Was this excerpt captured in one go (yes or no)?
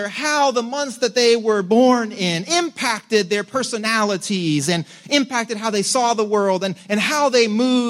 yes